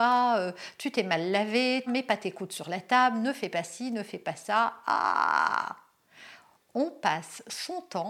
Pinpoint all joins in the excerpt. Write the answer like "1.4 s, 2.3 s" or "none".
1.9 s